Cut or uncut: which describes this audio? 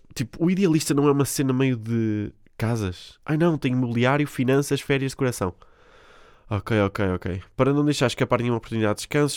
uncut